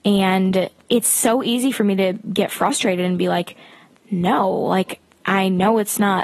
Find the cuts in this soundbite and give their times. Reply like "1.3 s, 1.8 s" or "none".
none